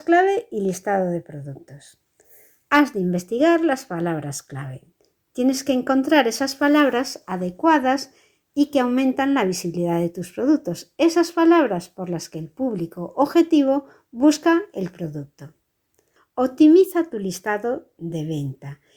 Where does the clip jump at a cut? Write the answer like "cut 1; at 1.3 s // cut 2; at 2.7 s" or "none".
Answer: none